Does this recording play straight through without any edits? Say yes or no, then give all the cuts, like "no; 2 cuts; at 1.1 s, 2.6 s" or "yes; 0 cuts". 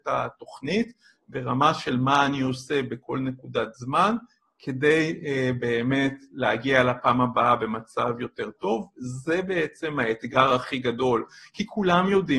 yes; 0 cuts